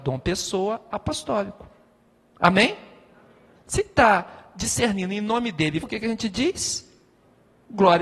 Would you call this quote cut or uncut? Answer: cut